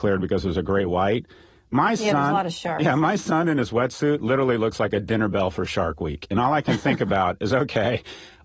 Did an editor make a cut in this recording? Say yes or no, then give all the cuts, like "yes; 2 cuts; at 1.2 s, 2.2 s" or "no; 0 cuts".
no; 0 cuts